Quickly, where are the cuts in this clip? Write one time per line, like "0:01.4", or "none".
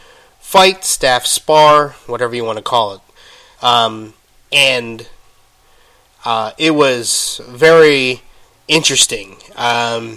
0:03.6